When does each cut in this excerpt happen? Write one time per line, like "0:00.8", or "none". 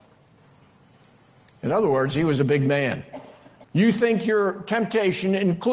0:03.6